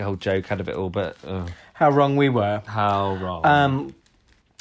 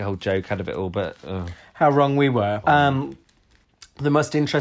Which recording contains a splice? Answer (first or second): second